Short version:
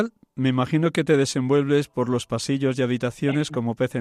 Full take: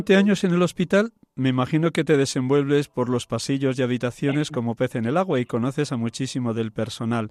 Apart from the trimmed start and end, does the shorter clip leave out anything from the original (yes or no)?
no